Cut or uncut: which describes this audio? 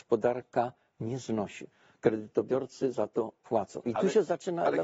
uncut